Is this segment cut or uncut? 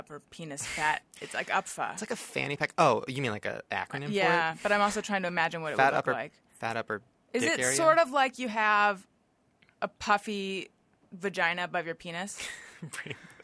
uncut